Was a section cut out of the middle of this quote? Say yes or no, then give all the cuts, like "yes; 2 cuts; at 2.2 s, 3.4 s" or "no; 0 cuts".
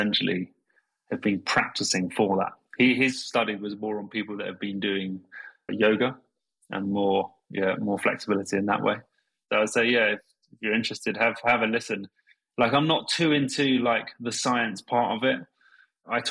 yes; 1 cut; at 5.7 s